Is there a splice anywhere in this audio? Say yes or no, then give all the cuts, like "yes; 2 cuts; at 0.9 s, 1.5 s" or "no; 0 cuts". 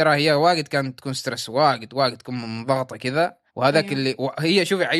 yes; 1 cut; at 3.5 s